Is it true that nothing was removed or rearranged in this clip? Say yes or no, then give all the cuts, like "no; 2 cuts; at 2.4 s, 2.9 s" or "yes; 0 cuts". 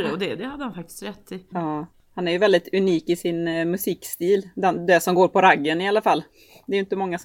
no; 1 cut; at 1.5 s